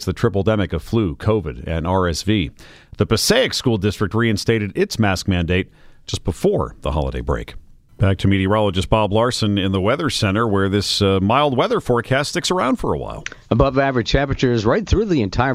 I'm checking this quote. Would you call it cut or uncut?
uncut